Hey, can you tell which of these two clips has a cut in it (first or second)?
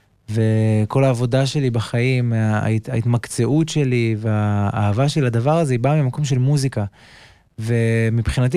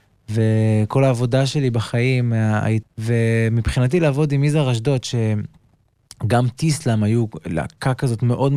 second